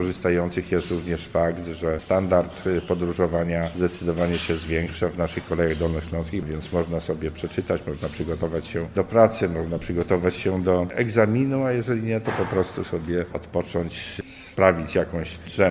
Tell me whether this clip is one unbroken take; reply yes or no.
yes